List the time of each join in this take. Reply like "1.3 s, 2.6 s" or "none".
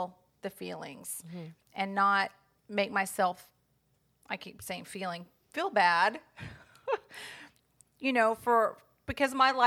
none